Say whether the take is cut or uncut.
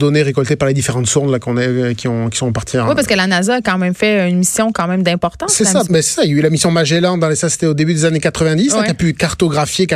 cut